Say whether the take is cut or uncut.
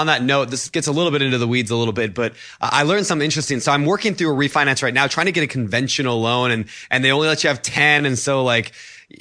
uncut